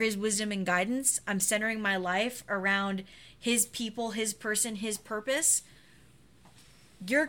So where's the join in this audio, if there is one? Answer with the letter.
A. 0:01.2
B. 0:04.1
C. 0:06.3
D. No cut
D